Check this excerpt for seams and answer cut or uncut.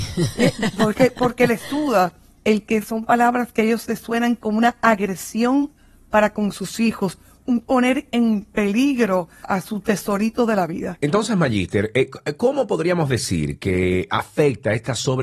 cut